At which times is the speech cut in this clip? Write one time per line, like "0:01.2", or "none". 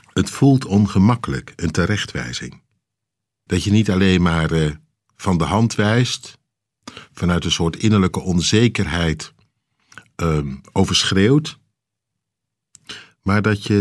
0:03.5